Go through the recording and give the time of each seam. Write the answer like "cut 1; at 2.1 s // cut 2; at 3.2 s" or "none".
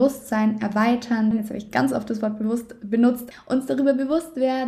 cut 1; at 1.3 s // cut 2; at 3.3 s